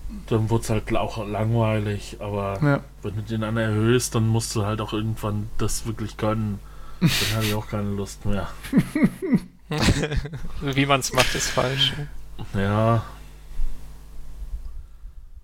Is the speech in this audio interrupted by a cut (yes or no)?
no